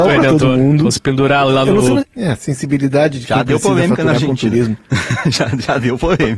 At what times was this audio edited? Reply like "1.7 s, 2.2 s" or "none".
2.0 s